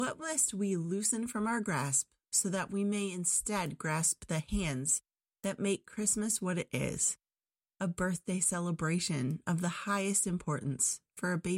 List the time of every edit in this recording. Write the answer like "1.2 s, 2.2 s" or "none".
none